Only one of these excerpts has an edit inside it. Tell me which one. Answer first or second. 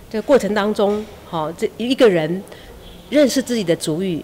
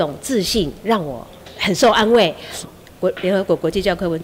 second